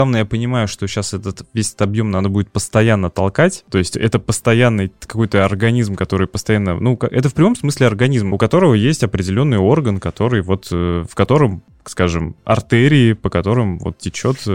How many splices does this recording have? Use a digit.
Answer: 1